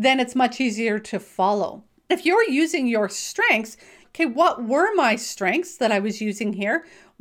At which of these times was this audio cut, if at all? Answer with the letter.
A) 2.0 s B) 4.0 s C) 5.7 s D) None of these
B